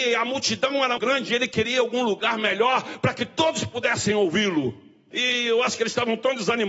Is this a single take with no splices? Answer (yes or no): no